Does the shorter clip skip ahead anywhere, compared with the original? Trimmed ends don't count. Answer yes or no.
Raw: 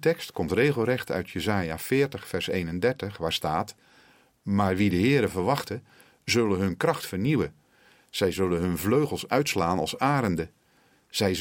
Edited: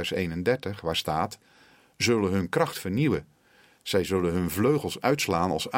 yes